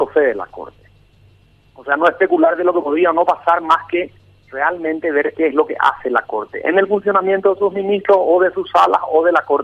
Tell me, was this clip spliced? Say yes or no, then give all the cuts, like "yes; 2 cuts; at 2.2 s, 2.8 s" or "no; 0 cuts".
no; 0 cuts